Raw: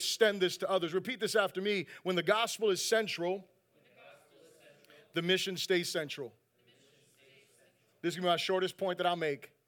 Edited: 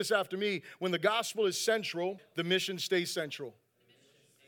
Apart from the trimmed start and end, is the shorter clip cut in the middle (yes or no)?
yes